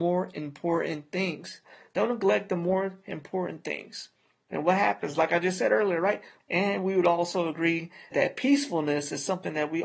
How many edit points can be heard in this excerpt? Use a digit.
2